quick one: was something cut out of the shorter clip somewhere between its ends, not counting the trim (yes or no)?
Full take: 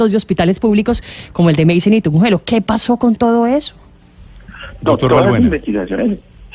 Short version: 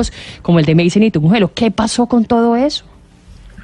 no